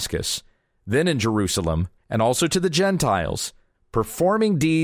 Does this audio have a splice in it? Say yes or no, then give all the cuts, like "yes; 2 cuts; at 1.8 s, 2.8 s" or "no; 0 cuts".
yes; 2 cuts; at 2.0 s, 3.7 s